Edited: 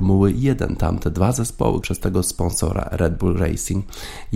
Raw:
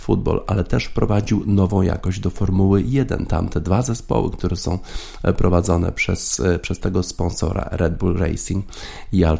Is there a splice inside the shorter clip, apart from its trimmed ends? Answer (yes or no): yes